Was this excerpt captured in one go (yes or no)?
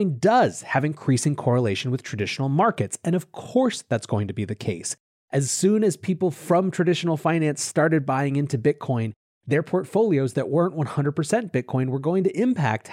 yes